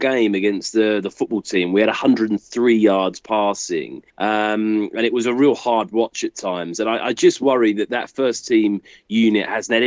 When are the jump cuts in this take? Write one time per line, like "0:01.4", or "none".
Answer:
0:04.1